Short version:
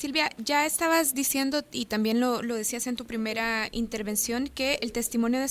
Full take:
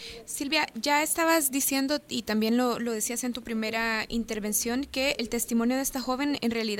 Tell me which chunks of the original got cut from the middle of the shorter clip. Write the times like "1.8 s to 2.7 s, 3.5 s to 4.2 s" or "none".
none